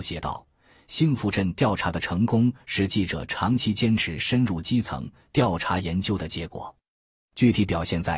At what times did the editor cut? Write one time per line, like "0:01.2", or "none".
none